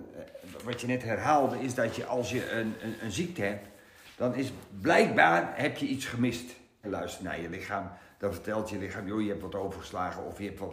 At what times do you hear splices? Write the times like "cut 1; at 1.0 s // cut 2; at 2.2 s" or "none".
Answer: cut 1; at 6.8 s